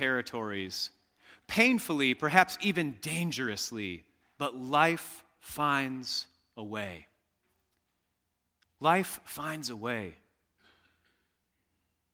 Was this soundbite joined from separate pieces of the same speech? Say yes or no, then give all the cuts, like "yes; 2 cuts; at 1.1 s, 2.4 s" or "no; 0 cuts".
no; 0 cuts